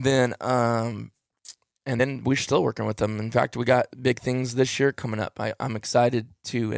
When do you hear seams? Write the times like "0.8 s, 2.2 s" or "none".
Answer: none